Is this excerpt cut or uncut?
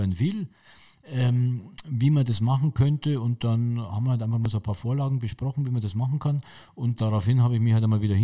cut